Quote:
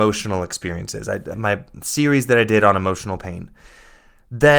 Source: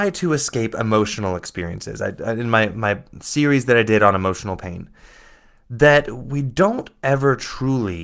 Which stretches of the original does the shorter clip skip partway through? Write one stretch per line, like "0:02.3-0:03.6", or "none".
0:02.3-0:02.7